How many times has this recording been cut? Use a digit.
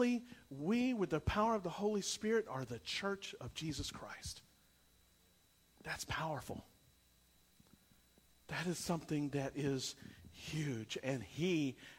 0